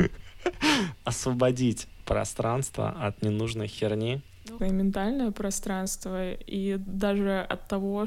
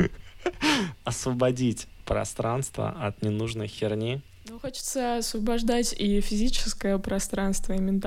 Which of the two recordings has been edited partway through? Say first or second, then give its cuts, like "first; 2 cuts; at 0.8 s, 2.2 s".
first; 1 cut; at 4.6 s